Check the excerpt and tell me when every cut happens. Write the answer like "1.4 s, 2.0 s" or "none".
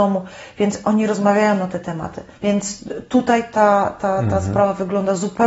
2.4 s